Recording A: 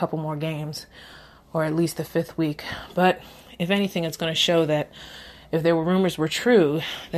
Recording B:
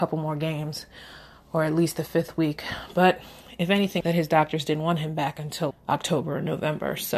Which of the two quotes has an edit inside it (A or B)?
B